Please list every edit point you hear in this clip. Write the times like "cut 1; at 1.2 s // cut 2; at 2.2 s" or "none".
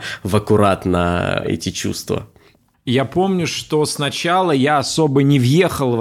cut 1; at 2.7 s